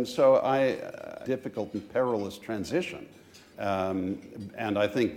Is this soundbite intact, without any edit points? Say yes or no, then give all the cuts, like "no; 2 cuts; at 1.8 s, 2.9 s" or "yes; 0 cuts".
no; 2 cuts; at 1.2 s, 3.5 s